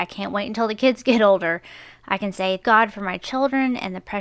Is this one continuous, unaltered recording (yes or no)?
no